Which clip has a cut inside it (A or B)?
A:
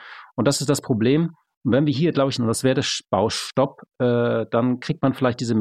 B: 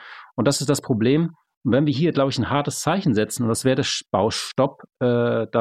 A